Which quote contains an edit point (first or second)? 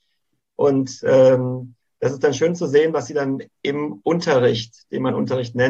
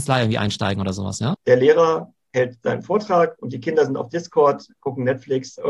second